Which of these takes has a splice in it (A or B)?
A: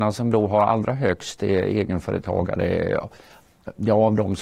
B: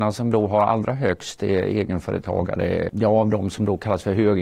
B